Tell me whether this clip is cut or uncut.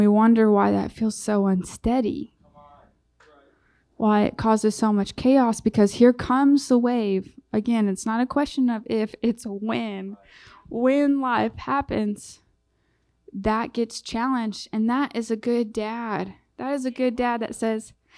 uncut